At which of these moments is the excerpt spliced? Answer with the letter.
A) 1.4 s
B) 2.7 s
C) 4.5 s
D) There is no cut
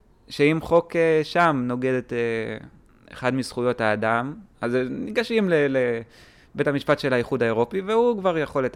C